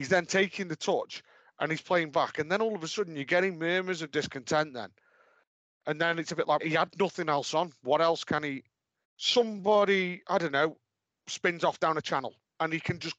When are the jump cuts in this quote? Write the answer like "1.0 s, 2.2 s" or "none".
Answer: 6.6 s, 9.0 s